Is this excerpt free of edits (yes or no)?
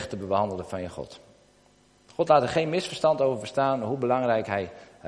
yes